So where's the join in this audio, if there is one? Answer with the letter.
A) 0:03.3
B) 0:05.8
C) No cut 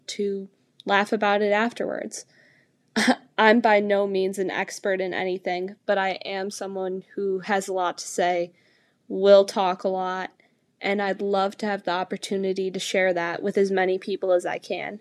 C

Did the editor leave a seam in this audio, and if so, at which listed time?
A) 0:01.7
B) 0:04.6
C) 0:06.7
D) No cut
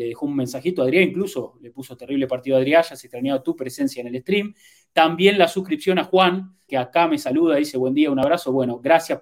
C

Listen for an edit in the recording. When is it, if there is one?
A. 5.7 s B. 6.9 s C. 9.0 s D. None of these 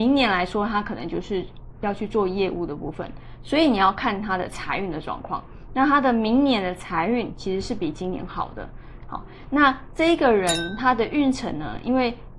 C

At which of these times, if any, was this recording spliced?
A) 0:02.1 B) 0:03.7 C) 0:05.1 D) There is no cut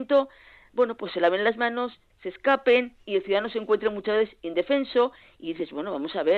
A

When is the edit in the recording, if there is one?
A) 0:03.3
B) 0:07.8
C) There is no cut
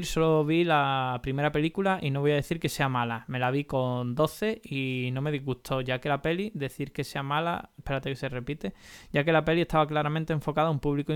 B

